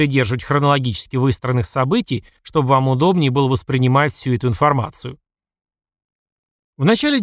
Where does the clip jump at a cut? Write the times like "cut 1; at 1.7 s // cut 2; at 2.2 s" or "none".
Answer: none